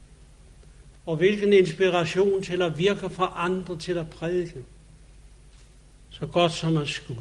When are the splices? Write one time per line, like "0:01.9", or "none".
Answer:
0:00.9
0:06.1